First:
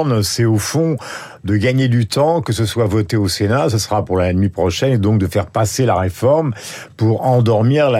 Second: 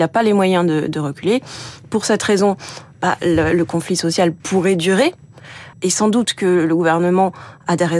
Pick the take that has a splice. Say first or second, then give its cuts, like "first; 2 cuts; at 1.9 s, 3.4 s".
second; 2 cuts; at 4.4 s, 5.7 s